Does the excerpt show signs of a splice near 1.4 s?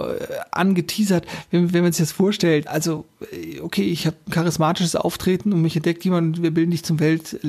no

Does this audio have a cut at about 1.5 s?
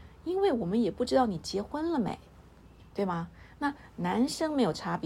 no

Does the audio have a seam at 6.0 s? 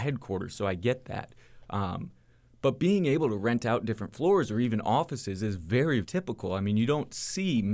yes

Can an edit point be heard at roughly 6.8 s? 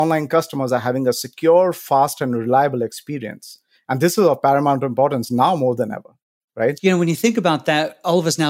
yes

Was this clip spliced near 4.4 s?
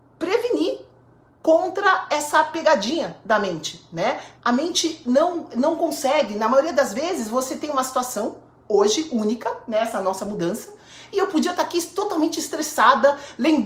yes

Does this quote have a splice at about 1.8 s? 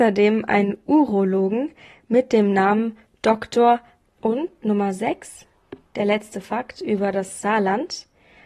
no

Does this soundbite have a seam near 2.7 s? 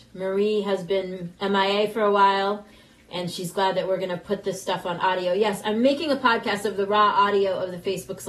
no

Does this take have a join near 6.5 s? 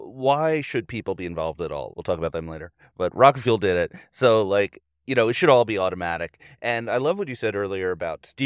no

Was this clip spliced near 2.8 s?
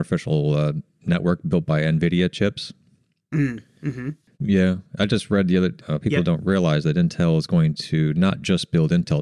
no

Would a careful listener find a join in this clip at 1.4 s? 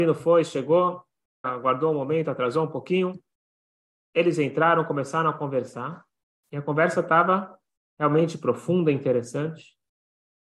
yes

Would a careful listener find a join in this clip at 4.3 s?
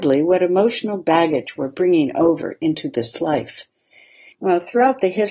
yes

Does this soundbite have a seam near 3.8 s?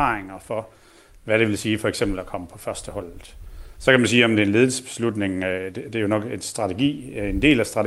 yes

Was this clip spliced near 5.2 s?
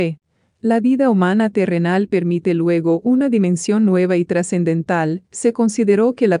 yes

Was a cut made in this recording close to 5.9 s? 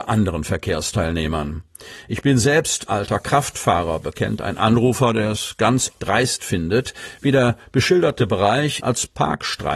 yes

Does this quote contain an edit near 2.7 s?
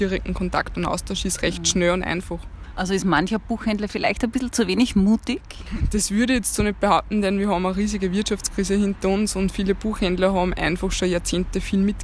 no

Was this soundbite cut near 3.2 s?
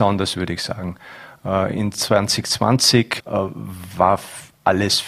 yes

